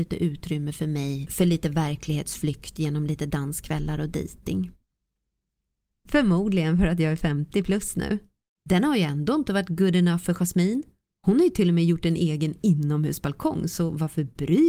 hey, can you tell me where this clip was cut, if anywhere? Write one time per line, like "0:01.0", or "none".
0:05.9
0:08.6